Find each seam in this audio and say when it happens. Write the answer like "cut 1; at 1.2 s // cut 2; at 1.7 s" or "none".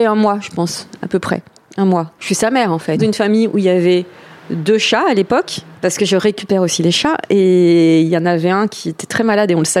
cut 1; at 3.0 s